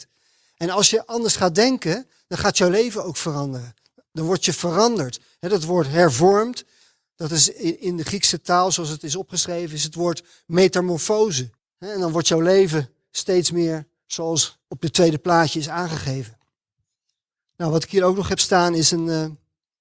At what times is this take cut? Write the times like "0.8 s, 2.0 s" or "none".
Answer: 11.6 s